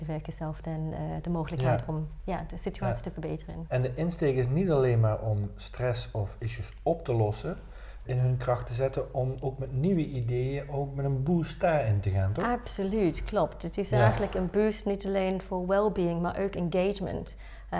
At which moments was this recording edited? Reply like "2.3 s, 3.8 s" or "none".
3.7 s, 8.1 s